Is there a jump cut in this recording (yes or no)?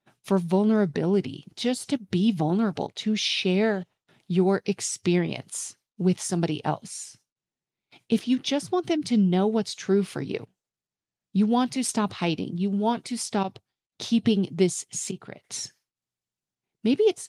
no